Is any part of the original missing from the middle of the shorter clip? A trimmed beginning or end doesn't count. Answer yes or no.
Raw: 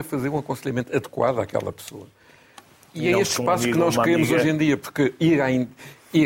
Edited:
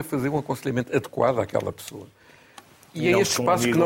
no